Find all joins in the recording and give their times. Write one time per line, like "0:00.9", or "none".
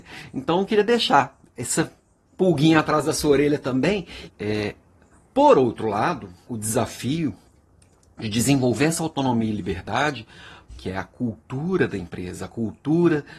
0:04.3
0:06.5
0:10.7